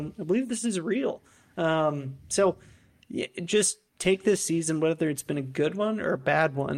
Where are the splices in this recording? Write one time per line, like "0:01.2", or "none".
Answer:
0:03.9